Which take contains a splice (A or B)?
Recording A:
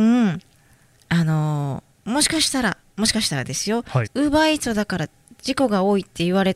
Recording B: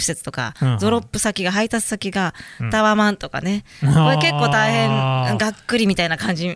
A